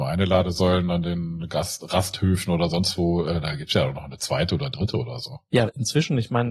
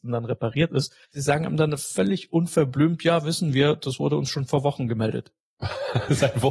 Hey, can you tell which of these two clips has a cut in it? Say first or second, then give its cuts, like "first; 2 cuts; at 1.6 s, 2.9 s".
second; 1 cut; at 1.0 s